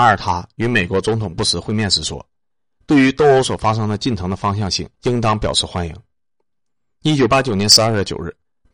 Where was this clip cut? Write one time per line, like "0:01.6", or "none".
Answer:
0:04.9